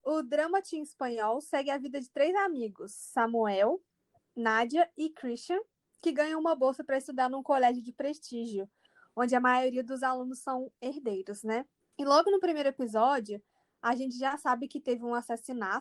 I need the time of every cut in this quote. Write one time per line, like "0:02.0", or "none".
none

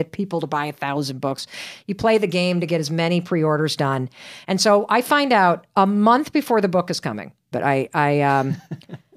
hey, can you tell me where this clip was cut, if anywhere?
0:07.5

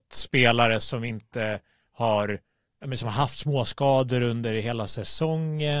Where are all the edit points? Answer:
none

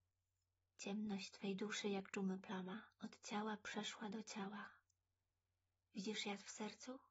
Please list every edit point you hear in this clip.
0:02.9

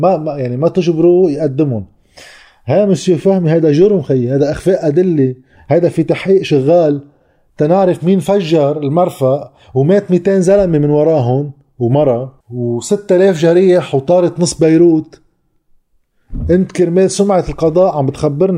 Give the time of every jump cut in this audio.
0:12.4

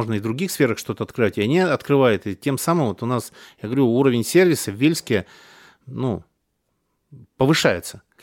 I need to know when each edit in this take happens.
none

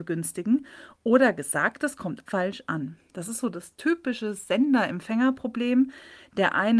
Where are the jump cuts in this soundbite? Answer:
0:02.3

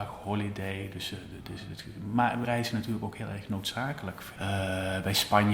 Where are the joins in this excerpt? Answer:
0:02.4
0:04.4

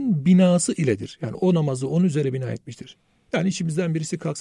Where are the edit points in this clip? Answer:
0:01.3

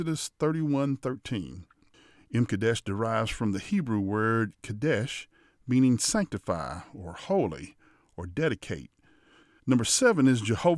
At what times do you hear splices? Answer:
0:09.6

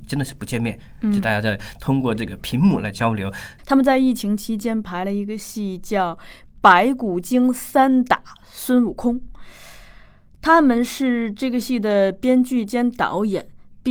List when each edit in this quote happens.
0:03.6

